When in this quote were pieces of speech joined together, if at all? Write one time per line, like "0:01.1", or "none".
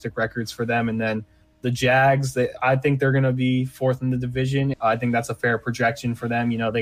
0:04.7